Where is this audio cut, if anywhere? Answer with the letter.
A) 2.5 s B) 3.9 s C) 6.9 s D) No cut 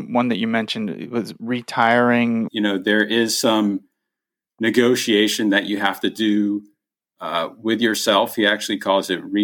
A